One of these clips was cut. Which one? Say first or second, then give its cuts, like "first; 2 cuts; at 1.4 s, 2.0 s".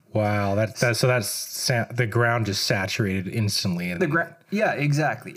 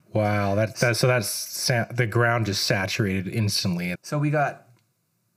second; 1 cut; at 4.0 s